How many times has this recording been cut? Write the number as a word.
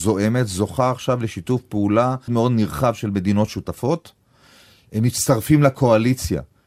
one